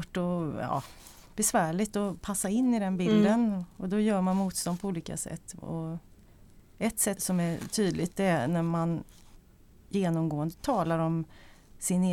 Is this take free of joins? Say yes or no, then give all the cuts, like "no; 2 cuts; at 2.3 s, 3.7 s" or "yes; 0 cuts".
no; 1 cut; at 7.2 s